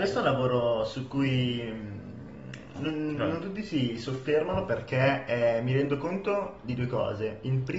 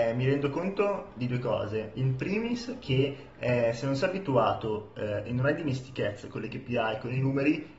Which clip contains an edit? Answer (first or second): first